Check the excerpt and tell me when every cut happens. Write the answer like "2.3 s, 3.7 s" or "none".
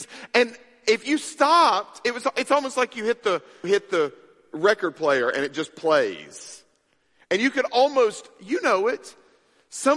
3.6 s